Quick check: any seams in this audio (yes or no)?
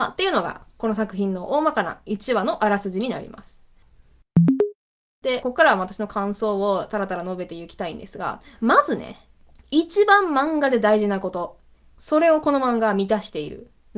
yes